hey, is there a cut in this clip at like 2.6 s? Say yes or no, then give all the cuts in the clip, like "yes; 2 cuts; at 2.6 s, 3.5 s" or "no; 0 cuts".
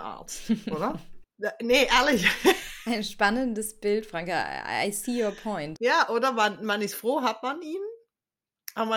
no; 1 cut; at 5.8 s